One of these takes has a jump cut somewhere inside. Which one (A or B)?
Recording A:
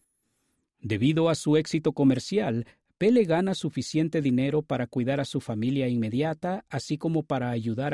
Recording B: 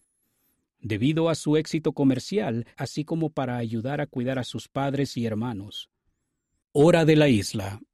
B